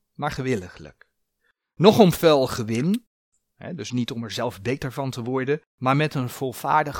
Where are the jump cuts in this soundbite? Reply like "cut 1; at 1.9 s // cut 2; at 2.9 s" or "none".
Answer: cut 1; at 3.9 s // cut 2; at 5.7 s